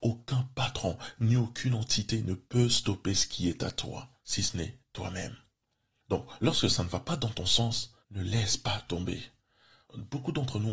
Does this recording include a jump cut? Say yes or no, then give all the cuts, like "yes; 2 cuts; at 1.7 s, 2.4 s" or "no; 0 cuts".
no; 0 cuts